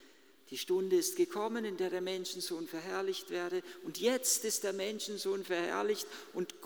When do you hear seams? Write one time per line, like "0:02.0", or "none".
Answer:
none